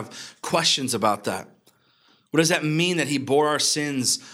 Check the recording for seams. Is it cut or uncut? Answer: uncut